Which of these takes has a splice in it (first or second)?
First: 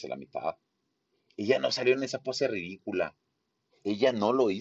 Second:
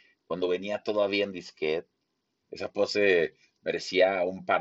second